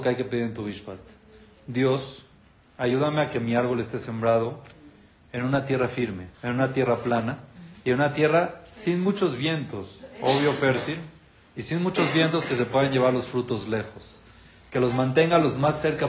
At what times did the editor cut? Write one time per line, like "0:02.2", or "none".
0:06.3